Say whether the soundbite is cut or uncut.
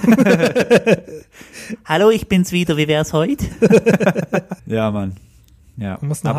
cut